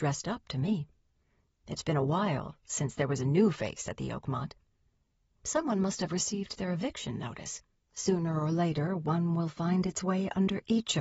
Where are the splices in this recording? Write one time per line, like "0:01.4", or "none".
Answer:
0:01.5
0:07.8